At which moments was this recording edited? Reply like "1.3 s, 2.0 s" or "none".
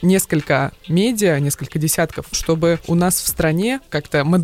2.3 s